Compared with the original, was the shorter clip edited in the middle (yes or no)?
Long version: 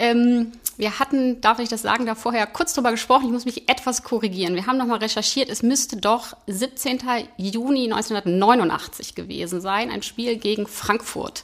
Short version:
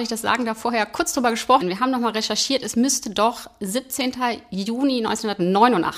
yes